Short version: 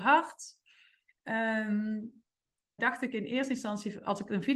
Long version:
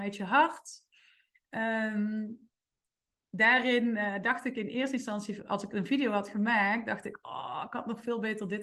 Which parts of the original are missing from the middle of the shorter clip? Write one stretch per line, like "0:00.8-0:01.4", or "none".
0:03.0-0:04.2